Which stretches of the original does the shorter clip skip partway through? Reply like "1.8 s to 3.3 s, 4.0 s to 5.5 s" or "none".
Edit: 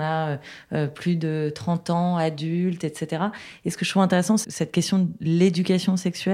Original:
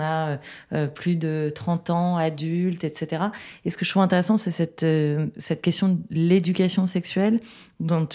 4.4 s to 5.3 s